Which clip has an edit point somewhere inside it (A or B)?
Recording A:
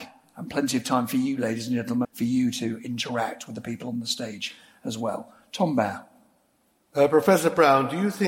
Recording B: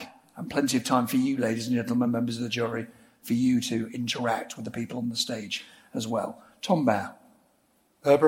A